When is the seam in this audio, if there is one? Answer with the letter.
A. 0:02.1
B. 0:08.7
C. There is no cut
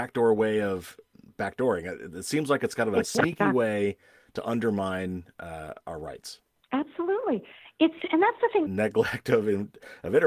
B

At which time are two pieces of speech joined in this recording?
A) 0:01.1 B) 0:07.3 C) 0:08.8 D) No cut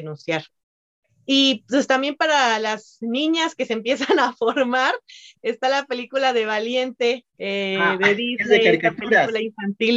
B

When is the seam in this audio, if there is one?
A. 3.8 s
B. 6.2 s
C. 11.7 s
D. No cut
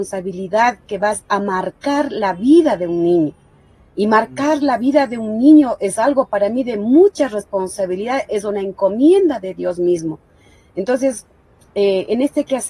D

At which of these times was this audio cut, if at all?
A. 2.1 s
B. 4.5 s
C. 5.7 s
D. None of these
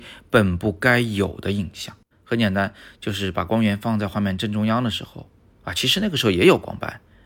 A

